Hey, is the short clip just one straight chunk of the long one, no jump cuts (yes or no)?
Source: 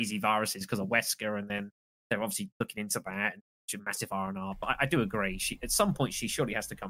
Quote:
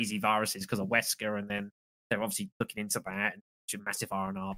yes